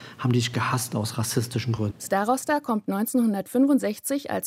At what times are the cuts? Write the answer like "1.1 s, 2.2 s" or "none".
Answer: 1.9 s